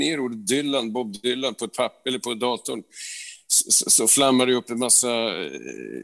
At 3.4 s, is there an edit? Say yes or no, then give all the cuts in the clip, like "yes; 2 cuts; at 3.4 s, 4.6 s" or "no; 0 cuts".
no; 0 cuts